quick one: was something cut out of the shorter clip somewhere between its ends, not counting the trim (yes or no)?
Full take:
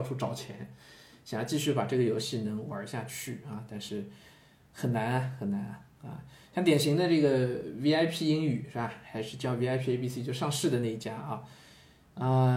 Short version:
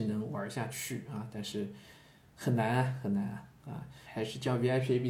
yes